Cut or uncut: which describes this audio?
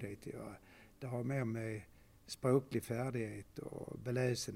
uncut